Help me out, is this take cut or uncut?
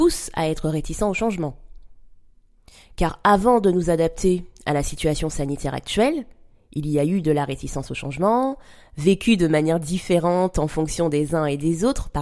uncut